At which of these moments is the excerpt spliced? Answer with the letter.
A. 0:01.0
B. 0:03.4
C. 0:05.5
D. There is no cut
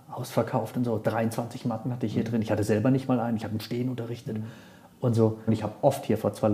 C